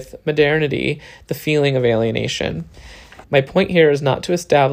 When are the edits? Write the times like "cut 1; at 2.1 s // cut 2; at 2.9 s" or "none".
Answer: cut 1; at 3.2 s